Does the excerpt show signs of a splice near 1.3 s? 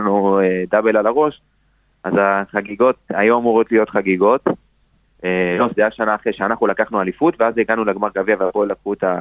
no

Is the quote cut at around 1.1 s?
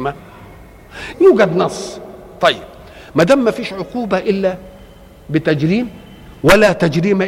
yes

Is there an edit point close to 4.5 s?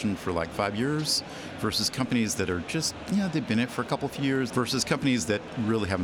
yes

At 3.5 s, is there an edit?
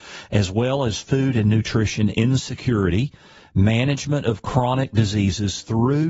no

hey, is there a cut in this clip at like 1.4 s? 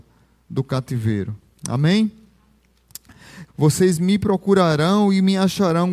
no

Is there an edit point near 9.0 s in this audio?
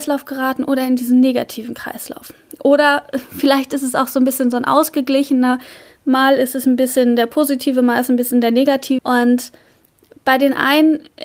yes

